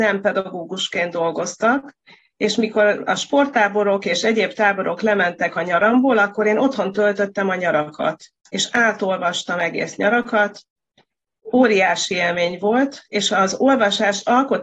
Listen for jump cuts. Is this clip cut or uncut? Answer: uncut